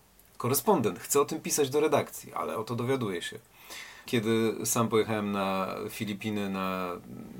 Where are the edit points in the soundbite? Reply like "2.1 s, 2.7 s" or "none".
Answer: 4.1 s